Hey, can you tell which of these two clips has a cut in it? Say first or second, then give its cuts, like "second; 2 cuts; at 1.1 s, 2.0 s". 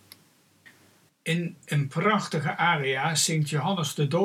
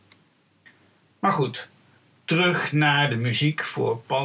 first; 1 cut; at 1.1 s